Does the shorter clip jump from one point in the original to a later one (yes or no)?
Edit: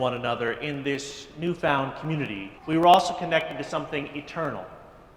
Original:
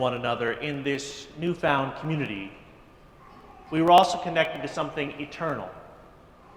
yes